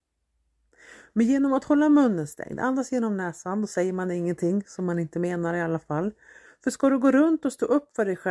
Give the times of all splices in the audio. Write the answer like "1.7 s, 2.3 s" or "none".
6.5 s